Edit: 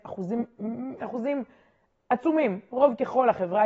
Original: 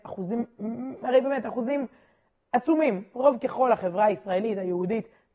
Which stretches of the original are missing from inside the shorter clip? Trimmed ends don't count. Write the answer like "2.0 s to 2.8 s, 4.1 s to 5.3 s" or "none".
1.0 s to 1.4 s